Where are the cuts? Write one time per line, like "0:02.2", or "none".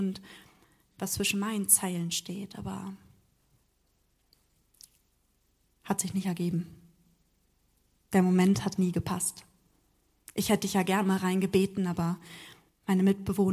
0:08.8